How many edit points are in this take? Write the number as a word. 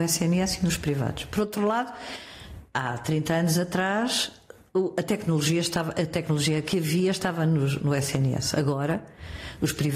zero